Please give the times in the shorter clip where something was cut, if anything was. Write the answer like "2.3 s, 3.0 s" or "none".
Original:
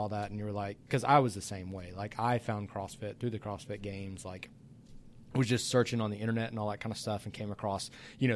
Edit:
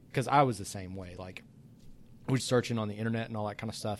1.2 s, 2.4 s